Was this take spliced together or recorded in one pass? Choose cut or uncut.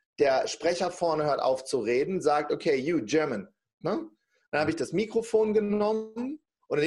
cut